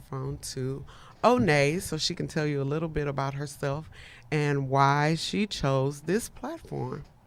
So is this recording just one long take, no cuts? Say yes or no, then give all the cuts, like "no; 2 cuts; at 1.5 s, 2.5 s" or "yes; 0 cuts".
yes; 0 cuts